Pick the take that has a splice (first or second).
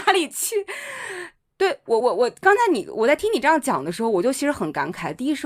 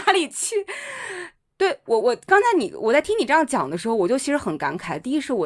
second